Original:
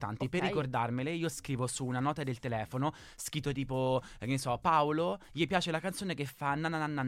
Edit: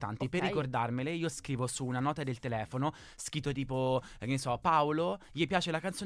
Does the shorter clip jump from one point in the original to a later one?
no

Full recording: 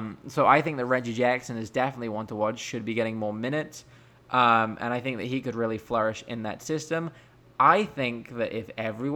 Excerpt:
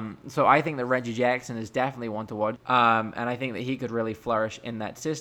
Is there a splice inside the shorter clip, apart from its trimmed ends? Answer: yes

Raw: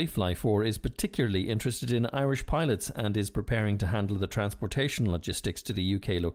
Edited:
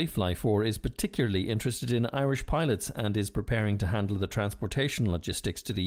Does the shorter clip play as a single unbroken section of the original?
yes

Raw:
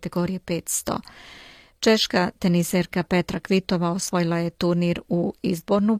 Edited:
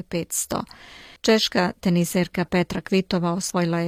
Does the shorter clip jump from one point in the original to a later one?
yes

